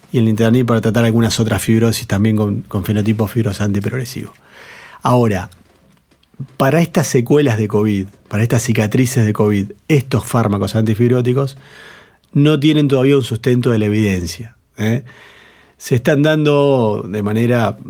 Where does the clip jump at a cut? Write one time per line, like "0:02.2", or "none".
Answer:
none